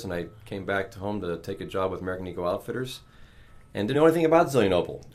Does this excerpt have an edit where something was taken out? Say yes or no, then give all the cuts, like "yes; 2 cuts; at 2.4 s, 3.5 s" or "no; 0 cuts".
yes; 1 cut; at 3.9 s